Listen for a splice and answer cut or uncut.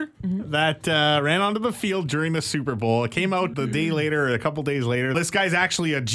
cut